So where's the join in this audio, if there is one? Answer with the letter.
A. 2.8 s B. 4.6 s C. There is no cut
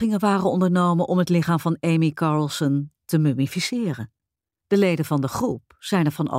B